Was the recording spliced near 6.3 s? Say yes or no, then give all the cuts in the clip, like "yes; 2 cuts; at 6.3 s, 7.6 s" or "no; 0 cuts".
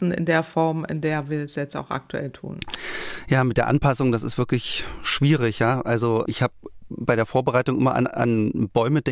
yes; 1 cut; at 6.3 s